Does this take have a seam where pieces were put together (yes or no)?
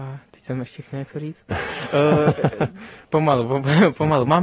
yes